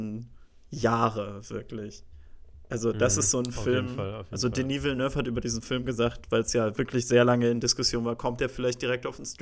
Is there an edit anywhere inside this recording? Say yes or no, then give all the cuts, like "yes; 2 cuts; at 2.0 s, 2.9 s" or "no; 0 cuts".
no; 0 cuts